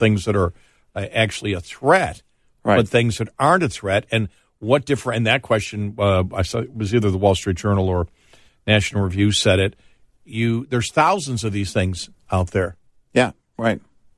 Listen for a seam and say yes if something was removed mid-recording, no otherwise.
no